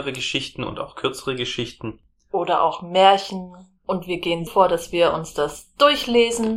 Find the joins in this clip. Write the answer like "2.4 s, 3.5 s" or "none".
4.5 s